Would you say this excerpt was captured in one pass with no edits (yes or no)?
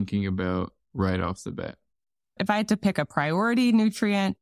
yes